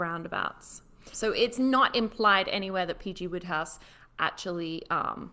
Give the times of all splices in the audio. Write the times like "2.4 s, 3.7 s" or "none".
1.1 s